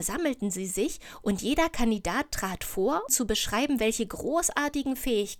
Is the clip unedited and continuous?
no; 1 cut; at 3.1 s

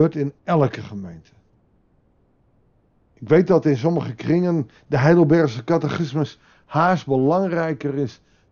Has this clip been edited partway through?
yes; 1 cut; at 3.1 s

